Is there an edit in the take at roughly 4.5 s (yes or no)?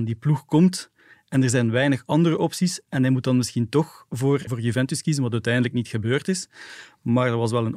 yes